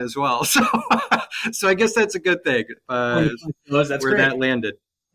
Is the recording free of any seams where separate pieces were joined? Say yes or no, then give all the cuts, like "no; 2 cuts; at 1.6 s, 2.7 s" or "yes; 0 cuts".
yes; 0 cuts